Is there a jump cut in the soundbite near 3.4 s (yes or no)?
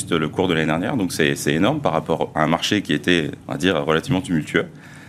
yes